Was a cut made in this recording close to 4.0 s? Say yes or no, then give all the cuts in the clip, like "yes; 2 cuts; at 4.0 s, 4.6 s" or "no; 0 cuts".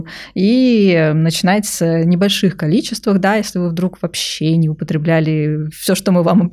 no; 0 cuts